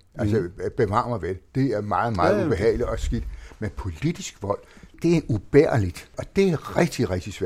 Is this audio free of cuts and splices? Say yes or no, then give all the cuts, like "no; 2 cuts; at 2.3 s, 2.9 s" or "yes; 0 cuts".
yes; 0 cuts